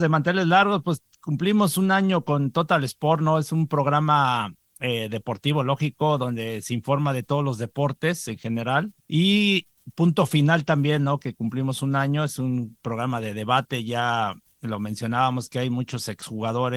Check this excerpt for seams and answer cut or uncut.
uncut